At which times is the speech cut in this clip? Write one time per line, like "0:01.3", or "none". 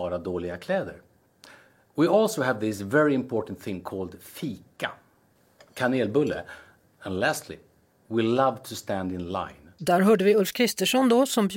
none